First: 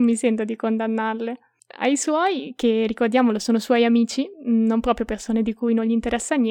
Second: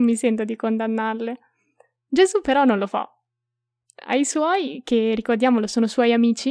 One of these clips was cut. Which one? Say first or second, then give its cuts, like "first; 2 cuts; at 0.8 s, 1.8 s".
first; 1 cut; at 1.6 s